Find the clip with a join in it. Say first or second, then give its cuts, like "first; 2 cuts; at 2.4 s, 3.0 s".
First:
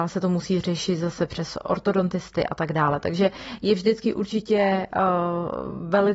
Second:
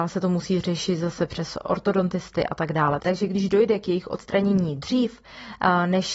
second; 1 cut; at 3.0 s